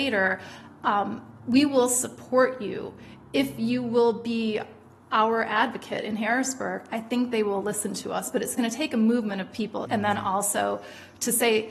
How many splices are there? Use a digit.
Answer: 1